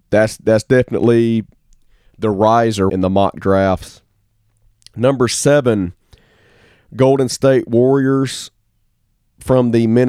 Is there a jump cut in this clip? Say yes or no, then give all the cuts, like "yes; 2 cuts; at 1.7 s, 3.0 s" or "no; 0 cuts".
yes; 1 cut; at 2.9 s